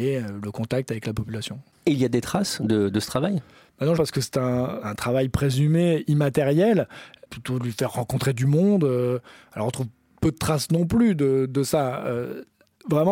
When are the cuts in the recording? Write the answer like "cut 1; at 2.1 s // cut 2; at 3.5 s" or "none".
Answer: cut 1; at 4.0 s